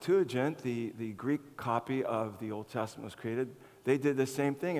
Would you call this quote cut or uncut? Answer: uncut